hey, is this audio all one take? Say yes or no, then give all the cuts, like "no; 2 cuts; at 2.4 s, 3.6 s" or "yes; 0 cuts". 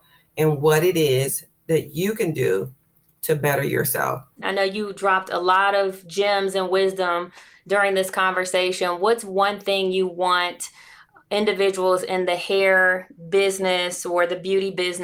no; 1 cut; at 4.4 s